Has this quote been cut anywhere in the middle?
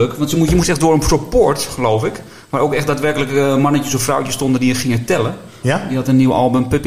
yes; 1 cut; at 5.6 s

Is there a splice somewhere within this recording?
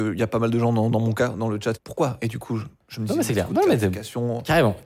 yes; 1 cut; at 1.7 s

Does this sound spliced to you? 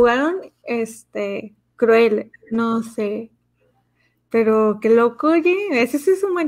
yes; 1 cut; at 2.3 s

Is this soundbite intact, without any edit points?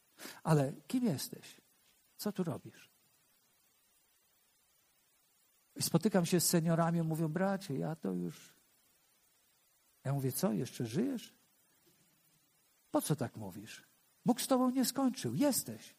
yes; 0 cuts

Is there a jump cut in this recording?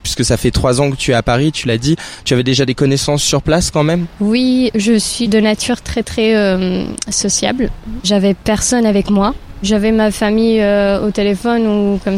yes; 1 cut; at 8.0 s

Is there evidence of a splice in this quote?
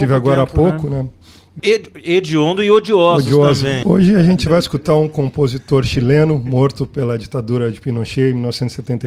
yes; 2 cuts; at 1.6 s, 3.8 s

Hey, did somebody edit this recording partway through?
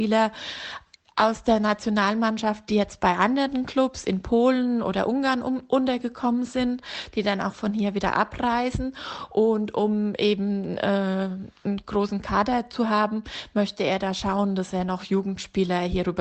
no; 0 cuts

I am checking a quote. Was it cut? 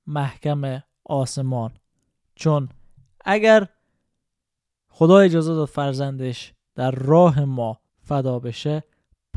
yes; 1 cut; at 7.9 s

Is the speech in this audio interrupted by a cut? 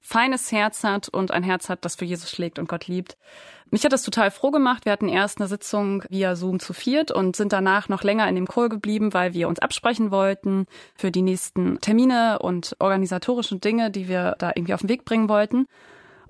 no; 0 cuts

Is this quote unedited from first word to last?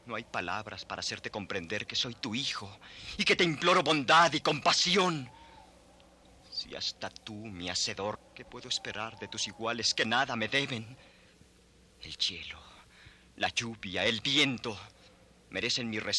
no; 1 cut; at 8.1 s

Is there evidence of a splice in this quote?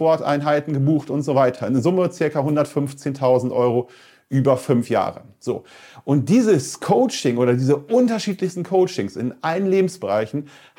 no; 0 cuts

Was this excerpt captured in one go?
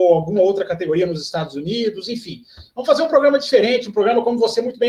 yes; 0 cuts

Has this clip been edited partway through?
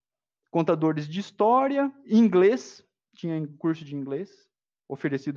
no; 0 cuts

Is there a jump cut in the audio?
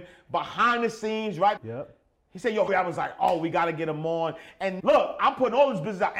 yes; 3 cuts; at 1.6 s, 2.7 s, 4.8 s

